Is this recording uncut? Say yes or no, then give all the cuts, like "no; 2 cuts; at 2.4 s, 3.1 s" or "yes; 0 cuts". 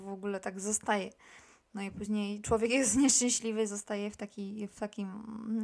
yes; 0 cuts